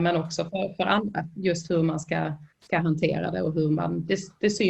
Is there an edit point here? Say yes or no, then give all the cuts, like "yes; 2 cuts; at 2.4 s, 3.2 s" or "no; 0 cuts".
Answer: yes; 1 cut; at 2.5 s